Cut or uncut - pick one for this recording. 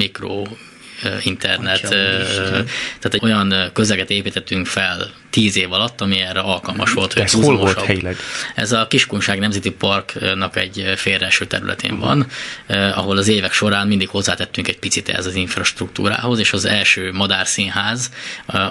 cut